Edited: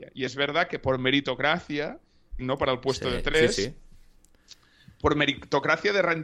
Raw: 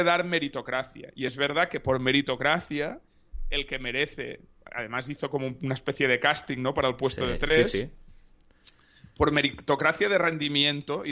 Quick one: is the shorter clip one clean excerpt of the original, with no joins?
no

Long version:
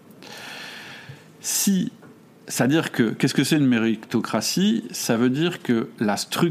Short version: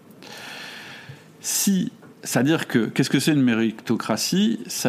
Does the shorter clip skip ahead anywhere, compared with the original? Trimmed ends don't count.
yes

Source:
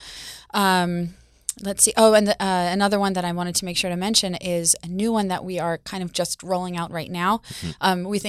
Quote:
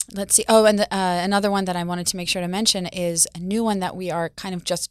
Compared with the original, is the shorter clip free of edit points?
yes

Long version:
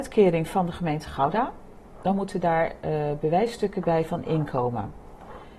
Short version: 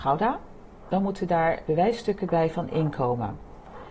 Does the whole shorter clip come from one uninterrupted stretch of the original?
no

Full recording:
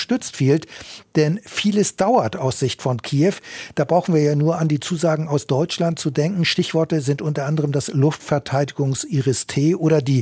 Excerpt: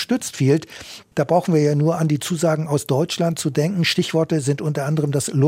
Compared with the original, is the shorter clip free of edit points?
no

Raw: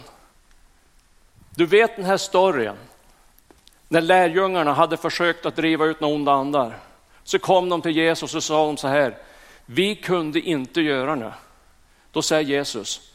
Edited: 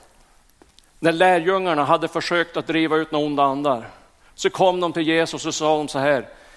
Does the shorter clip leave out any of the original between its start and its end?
no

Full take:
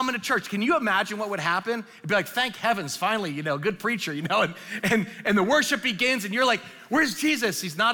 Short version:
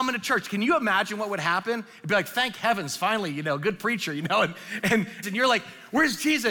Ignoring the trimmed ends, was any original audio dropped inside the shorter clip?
yes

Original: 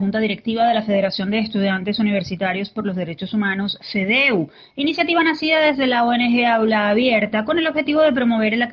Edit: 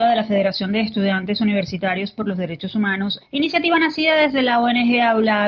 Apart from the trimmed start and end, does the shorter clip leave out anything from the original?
yes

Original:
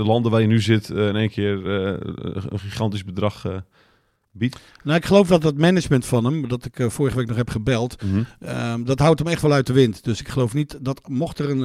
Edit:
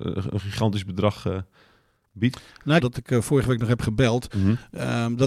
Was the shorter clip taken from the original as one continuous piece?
no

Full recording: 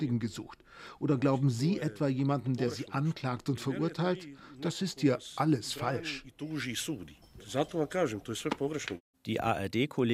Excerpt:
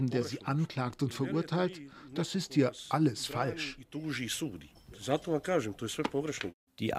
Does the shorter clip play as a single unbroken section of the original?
yes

